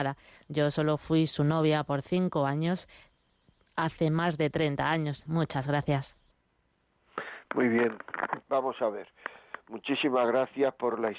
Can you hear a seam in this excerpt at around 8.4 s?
yes; 2 cuts; at 5.3 s, 8.4 s

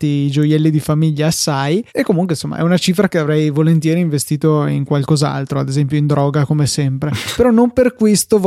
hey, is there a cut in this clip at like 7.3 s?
yes; 2 cuts; at 1.9 s, 7.3 s

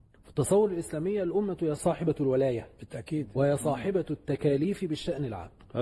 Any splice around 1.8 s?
yes; 1 cut; at 1.8 s

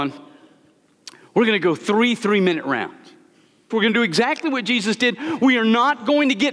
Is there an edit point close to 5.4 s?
no; 1 cut; at 3.7 s

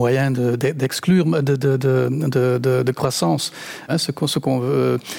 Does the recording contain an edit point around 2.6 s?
no; 1 cut; at 3.9 s

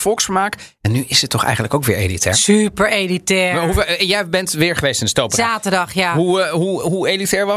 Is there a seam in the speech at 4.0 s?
no; 0 cuts

